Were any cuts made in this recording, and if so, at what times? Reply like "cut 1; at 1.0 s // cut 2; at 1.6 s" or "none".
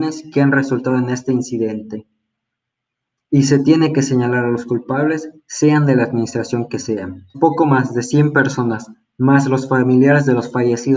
cut 1; at 7.3 s